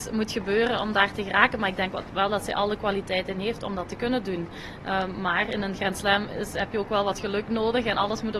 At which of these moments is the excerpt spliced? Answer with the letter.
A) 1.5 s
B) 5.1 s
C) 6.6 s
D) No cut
D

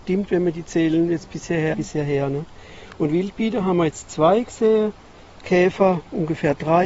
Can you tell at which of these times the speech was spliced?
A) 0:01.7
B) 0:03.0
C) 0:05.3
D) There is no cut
A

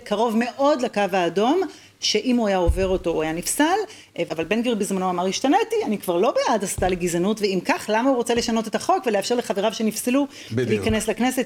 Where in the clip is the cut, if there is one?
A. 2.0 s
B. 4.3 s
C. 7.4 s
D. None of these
B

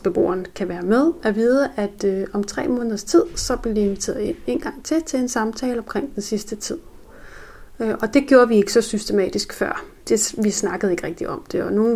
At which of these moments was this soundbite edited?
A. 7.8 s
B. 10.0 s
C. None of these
B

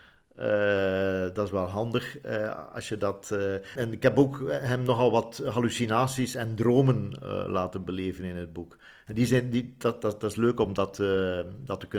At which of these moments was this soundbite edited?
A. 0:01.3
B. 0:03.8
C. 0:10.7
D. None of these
B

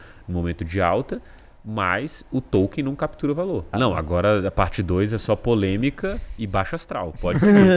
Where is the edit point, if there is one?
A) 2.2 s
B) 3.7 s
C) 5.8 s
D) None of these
B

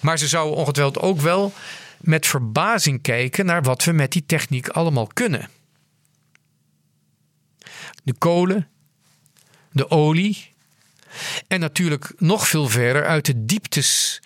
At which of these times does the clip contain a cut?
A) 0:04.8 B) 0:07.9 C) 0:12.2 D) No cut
B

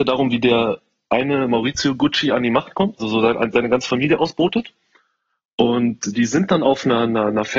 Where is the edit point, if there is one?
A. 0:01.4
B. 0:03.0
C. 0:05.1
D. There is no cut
B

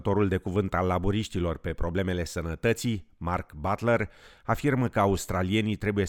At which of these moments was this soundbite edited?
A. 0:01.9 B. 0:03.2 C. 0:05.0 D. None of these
D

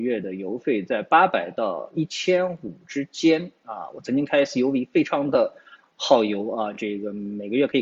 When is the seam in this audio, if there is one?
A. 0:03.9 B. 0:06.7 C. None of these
C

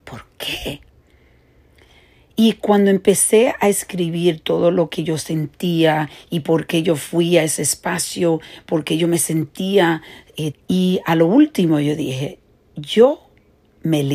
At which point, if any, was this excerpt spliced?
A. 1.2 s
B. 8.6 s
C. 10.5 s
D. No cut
C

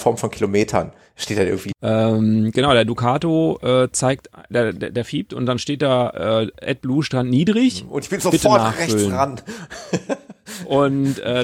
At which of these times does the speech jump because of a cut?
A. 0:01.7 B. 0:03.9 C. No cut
A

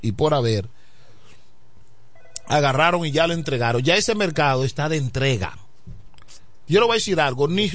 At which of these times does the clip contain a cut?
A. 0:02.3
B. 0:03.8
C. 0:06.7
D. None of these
C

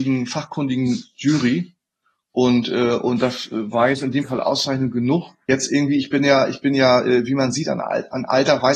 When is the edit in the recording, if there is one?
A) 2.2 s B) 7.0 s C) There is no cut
C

